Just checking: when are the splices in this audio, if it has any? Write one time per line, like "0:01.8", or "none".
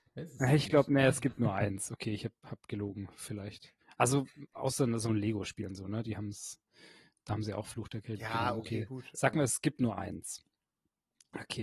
none